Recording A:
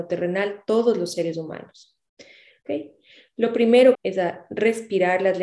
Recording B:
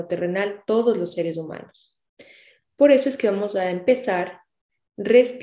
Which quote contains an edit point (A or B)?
A